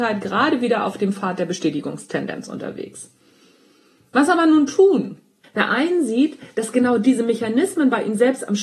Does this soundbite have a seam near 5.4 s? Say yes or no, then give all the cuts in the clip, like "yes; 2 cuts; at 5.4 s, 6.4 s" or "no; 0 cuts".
yes; 1 cut; at 5.4 s